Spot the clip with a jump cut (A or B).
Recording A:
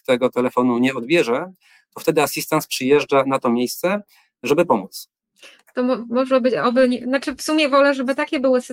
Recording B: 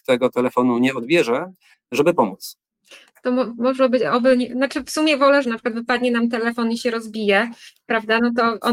B